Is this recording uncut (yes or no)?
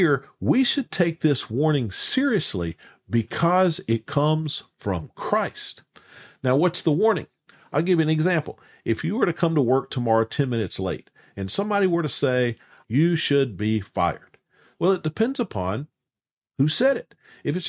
no